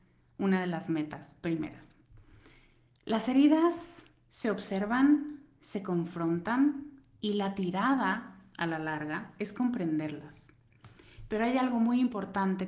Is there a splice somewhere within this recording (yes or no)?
no